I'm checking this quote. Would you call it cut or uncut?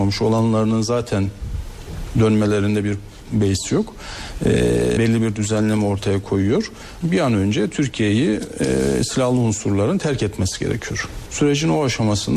cut